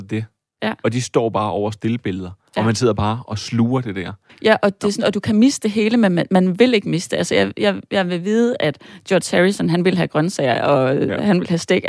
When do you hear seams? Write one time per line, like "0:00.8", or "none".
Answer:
none